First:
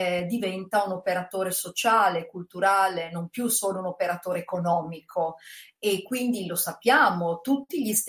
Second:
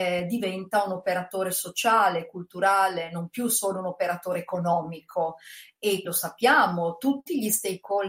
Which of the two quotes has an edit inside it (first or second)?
second